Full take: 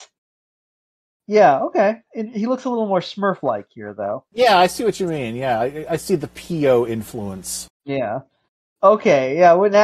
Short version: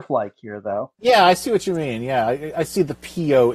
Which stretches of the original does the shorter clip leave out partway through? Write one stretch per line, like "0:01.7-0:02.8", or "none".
none